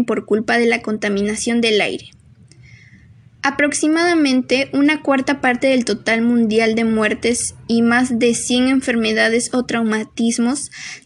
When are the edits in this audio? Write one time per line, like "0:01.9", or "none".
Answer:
none